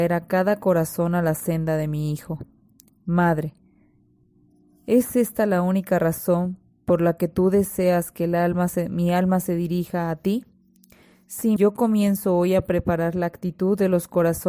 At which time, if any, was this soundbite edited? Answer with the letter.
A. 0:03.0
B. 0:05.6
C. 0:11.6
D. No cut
C